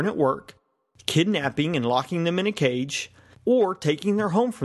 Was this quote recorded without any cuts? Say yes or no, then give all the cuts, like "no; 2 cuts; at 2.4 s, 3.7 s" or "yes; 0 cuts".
no; 1 cut; at 3.3 s